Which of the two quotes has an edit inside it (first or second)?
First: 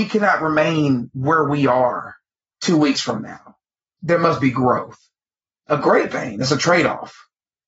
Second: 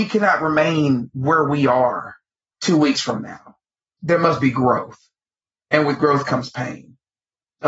first